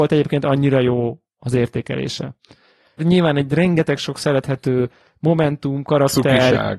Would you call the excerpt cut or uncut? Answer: cut